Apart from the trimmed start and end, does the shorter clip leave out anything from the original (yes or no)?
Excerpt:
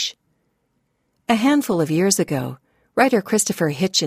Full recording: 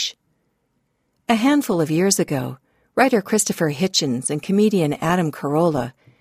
no